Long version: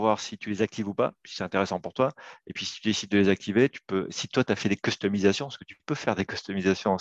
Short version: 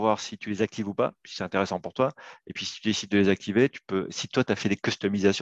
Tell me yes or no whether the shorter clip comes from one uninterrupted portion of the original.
yes